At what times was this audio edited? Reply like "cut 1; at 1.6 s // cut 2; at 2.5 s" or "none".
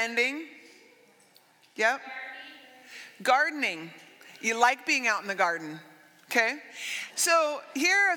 cut 1; at 7.1 s